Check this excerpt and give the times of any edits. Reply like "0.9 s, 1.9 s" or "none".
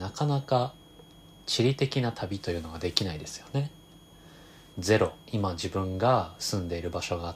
4.7 s

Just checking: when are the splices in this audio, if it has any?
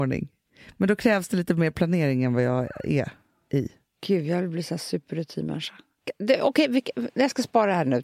none

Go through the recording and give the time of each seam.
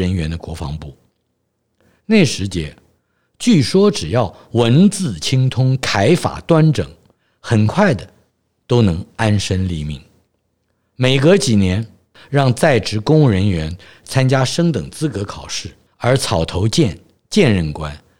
12.2 s, 15.9 s

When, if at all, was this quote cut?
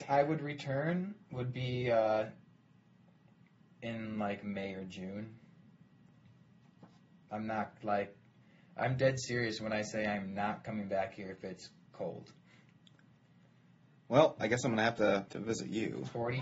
11.9 s, 15.3 s

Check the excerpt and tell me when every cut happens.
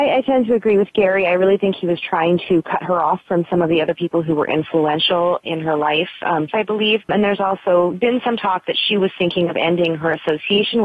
6.5 s, 7.9 s

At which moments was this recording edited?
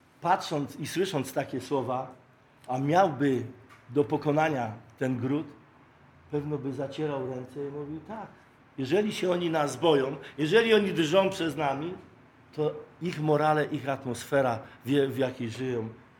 none

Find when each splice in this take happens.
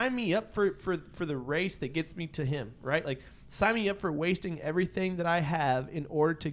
none

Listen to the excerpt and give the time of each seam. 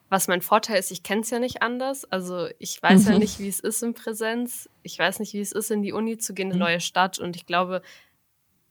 6.5 s

